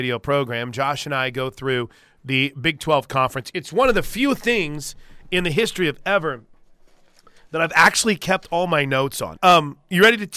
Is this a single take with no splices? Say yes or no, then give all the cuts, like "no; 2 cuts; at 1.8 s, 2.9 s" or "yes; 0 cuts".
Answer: no; 1 cut; at 9.4 s